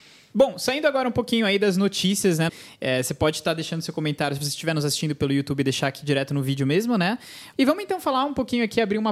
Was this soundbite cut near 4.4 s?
no; 2 cuts; at 2.5 s, 7.5 s

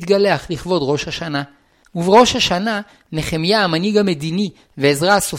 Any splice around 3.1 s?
no; 1 cut; at 1.8 s

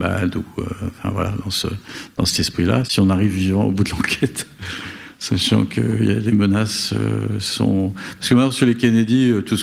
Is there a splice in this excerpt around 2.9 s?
yes; 1 cut; at 2.9 s

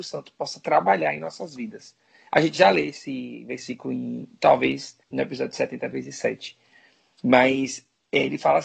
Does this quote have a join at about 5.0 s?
yes; 1 cut; at 5.0 s

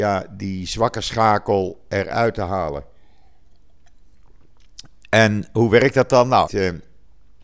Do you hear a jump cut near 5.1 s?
no; 1 cut; at 6.5 s

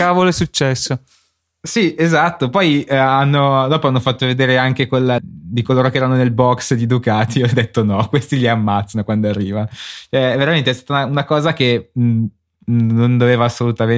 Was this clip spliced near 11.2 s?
no; 1 cut; at 5.2 s

